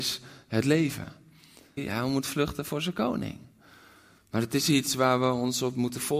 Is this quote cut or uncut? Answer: cut